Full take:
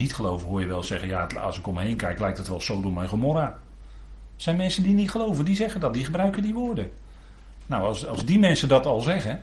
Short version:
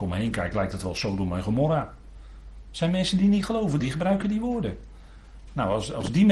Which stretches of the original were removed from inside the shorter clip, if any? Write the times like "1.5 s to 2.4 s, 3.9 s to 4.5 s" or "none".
5.5 s to 5.9 s